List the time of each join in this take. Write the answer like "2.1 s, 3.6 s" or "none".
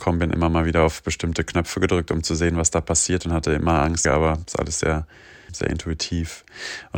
4.0 s, 5.5 s